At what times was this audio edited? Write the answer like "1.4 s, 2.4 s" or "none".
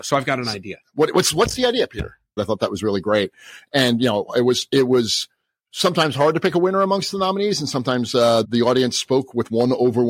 2.4 s, 8.4 s